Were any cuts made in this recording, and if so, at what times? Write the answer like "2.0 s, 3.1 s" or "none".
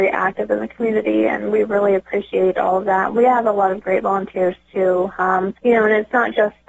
5.6 s